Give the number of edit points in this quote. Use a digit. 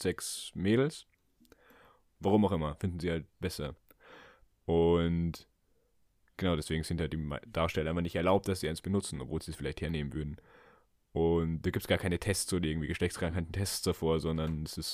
1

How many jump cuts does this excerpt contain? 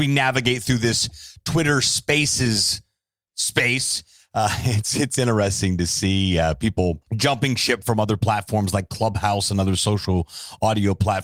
1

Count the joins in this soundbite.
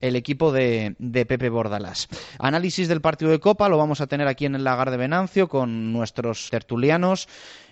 1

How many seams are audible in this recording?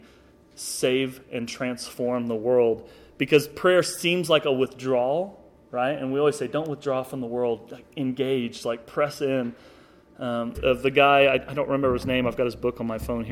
1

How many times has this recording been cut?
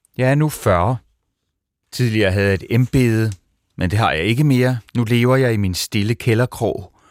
1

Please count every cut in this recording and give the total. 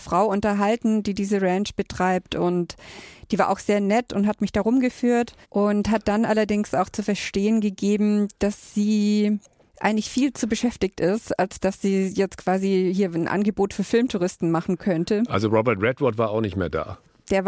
1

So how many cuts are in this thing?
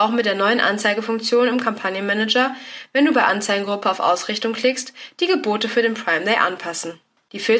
0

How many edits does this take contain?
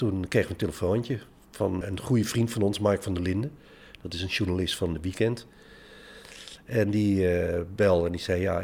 1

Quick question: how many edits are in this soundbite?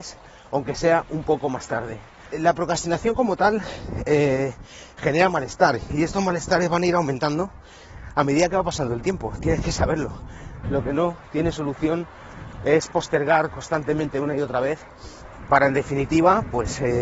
2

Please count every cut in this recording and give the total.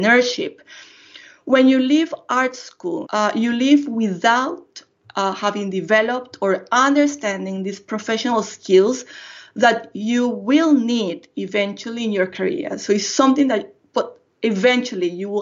1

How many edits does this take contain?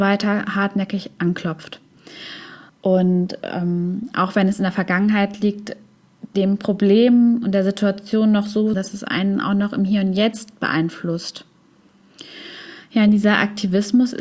2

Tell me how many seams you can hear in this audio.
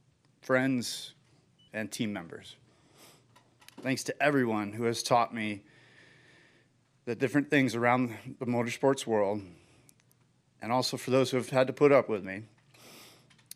1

